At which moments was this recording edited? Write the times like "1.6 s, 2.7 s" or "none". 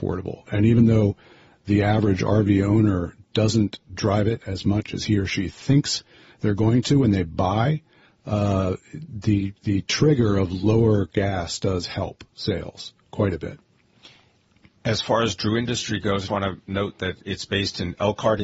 16.3 s

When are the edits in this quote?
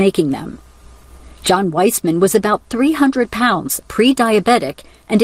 none

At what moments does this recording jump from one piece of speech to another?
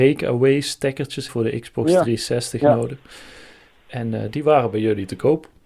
1.3 s

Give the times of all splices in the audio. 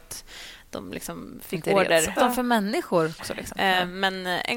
2.2 s, 3.2 s

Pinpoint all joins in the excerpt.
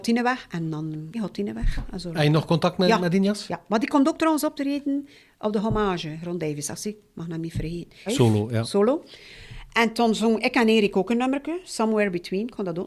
1.1 s, 8.1 s

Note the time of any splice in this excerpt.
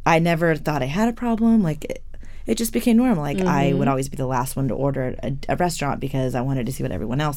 none

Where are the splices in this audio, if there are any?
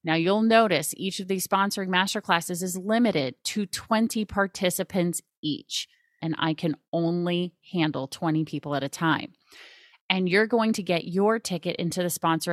6.2 s, 9.9 s

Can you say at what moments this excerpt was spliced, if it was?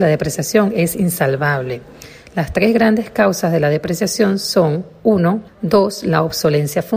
5.5 s

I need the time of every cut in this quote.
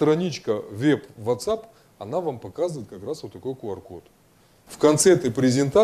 4.7 s

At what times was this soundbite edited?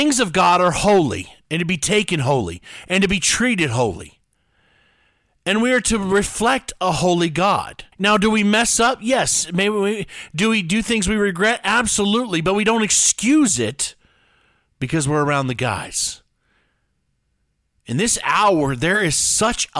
7.9 s

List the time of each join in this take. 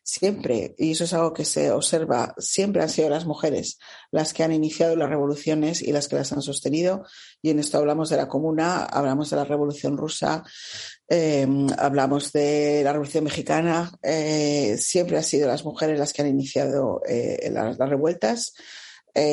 none

